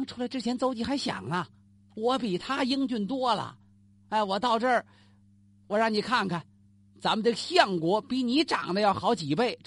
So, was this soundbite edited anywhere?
no; 0 cuts

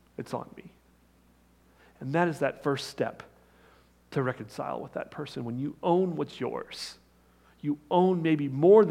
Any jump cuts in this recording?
no; 0 cuts

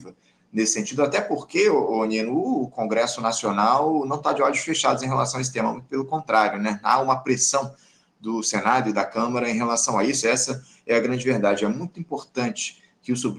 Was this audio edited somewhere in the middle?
yes; 1 cut; at 10.2 s

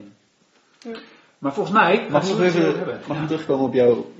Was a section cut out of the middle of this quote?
yes; 1 cut; at 3.3 s

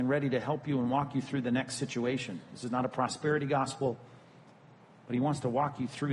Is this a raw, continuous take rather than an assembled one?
yes; 0 cuts

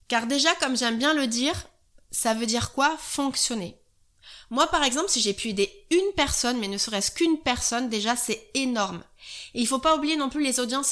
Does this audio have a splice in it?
no; 0 cuts

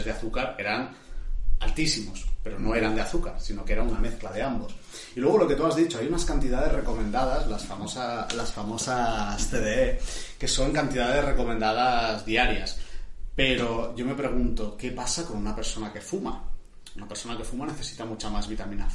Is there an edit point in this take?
no; 0 cuts

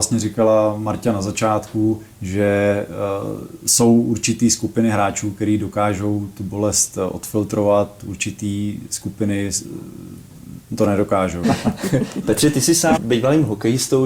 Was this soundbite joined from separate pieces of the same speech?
yes; 2 cuts; at 11.4 s, 13.0 s

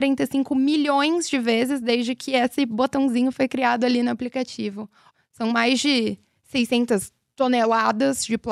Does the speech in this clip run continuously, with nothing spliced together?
no; 1 cut; at 5.1 s

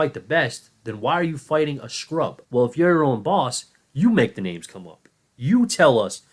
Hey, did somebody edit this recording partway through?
yes; 1 cut; at 2.4 s

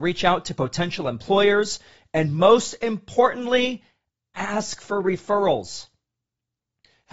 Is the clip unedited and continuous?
yes; 0 cuts

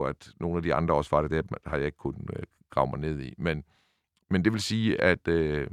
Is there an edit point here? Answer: no; 0 cuts

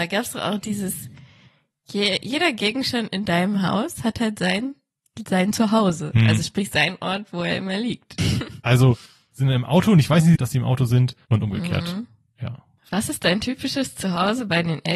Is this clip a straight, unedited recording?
no; 2 cuts; at 8.2 s, 10.4 s

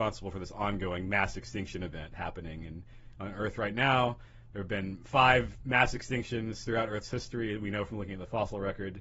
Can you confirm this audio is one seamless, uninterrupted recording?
yes; 0 cuts

